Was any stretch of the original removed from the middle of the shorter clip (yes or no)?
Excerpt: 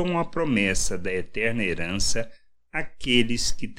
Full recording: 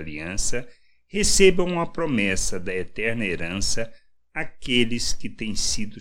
no